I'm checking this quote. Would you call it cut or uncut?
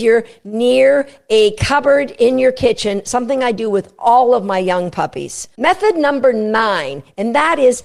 cut